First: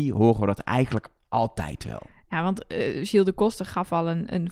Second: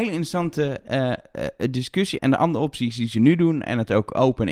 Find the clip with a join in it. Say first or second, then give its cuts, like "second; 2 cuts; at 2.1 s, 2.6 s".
second; 1 cut; at 2.2 s